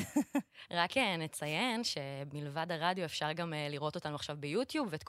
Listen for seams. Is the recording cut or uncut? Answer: uncut